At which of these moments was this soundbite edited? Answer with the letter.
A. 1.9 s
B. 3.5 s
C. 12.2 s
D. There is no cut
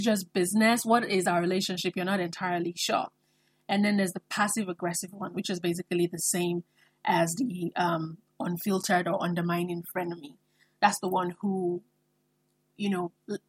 D